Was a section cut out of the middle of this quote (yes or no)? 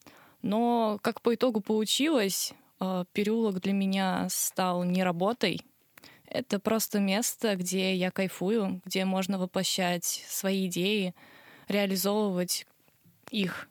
no